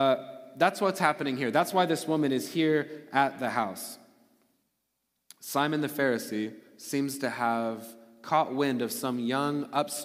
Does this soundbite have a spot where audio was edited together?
no; 0 cuts

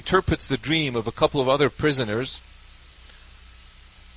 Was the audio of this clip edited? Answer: no; 0 cuts

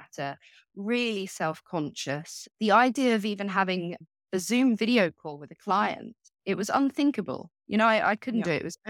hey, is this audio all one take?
yes; 0 cuts

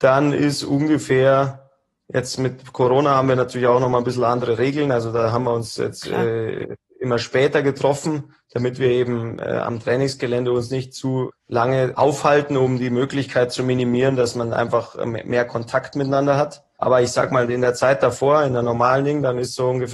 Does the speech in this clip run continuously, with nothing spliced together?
yes; 0 cuts

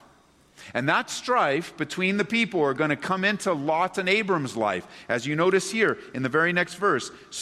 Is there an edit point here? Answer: no; 0 cuts

